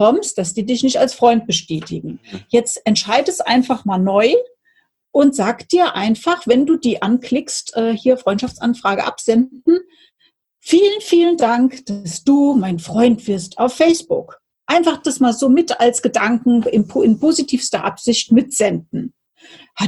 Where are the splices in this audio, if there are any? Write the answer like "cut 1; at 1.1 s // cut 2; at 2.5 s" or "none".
none